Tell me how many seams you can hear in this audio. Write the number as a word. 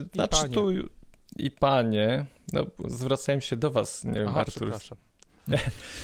zero